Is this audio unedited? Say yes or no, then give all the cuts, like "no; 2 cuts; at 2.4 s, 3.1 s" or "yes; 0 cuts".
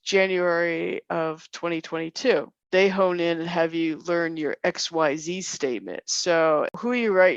yes; 0 cuts